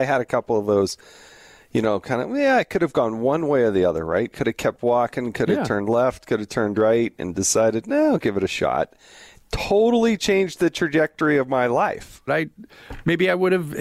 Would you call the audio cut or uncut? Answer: cut